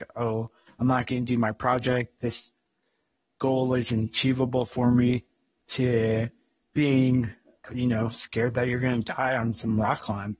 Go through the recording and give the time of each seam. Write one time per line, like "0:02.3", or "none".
none